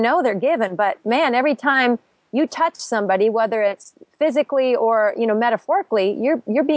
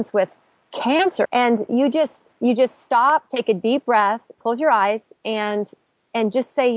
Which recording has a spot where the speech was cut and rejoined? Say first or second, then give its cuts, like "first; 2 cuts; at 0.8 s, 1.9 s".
second; 1 cut; at 1.3 s